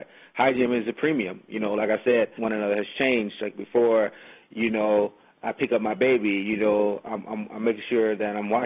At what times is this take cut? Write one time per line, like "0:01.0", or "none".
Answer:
0:02.4